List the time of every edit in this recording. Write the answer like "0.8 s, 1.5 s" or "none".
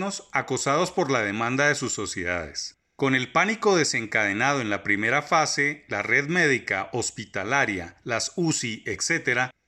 2.8 s